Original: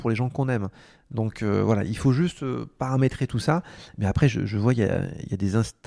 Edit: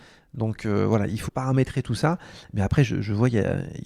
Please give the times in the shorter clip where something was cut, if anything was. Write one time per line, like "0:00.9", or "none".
0:01.3